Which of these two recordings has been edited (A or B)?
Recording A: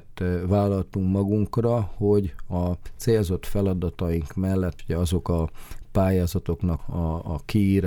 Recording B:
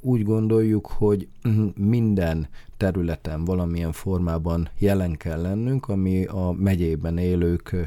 A